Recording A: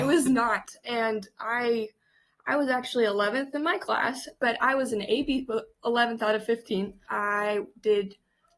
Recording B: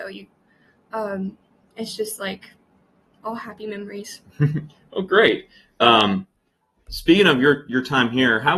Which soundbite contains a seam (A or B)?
A